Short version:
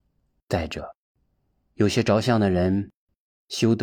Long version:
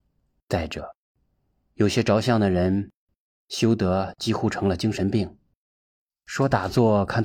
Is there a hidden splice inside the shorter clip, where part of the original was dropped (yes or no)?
no